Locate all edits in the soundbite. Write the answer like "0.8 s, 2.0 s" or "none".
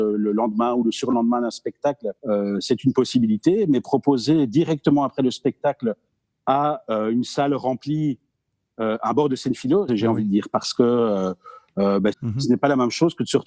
2.2 s, 9.9 s, 12.1 s